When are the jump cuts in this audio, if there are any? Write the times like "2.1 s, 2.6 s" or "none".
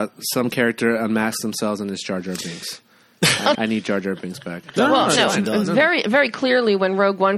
3.5 s, 4.7 s